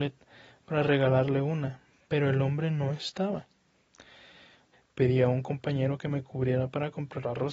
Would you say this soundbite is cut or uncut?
cut